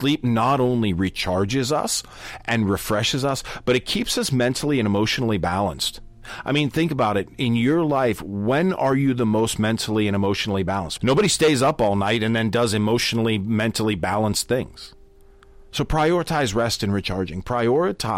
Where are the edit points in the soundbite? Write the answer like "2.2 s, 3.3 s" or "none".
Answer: 11.0 s